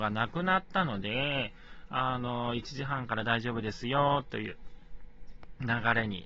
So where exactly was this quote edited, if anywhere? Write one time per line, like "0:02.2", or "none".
none